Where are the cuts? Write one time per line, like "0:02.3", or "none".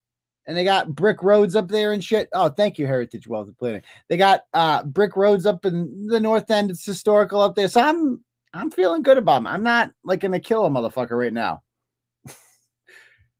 none